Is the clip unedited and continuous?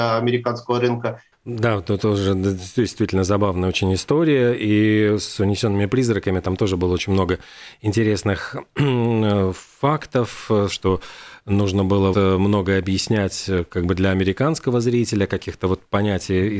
no; 3 cuts; at 1.3 s, 10.7 s, 12.1 s

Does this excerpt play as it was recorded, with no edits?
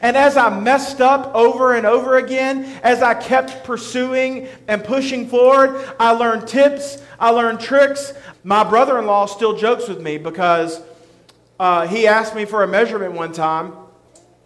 no; 1 cut; at 8.3 s

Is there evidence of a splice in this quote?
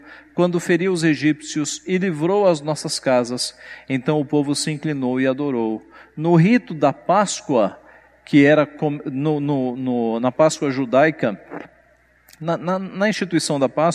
no; 0 cuts

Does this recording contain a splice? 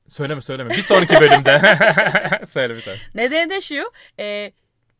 no; 0 cuts

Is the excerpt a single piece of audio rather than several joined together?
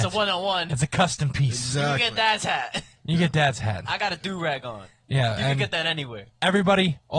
yes; 0 cuts

